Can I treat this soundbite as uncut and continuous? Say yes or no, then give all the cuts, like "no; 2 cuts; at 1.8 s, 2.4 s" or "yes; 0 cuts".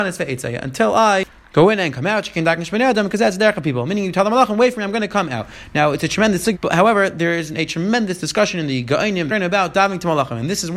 no; 2 cuts; at 6.5 s, 9.3 s